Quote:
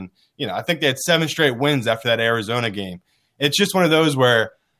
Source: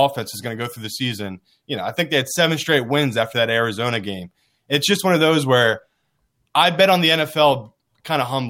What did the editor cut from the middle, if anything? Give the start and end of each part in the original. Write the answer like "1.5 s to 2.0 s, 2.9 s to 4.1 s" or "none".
none